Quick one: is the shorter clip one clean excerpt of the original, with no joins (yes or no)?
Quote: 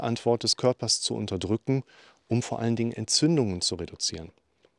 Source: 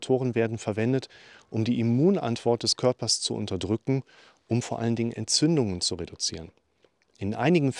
yes